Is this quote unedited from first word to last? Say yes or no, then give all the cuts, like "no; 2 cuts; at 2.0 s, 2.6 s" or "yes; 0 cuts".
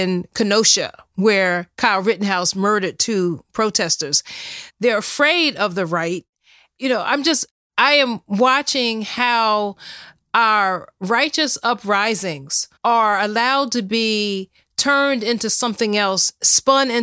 no; 3 cuts; at 4.7 s, 6.8 s, 12.8 s